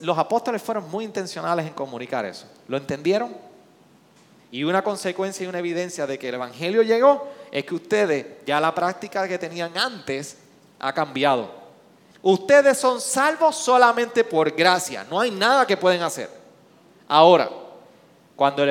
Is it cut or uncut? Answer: cut